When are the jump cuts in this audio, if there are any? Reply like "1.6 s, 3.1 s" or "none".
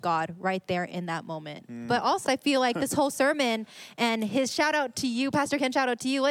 2.3 s